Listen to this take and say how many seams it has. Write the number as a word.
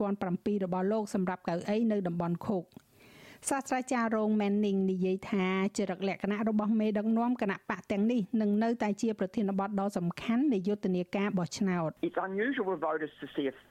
one